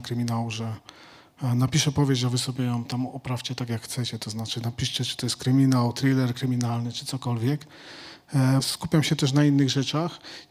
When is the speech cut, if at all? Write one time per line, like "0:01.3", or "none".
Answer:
0:08.6